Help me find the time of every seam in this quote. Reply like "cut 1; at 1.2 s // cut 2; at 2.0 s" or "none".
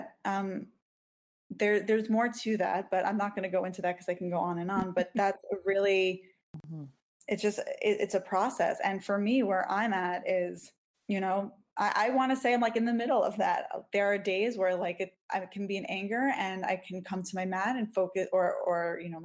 none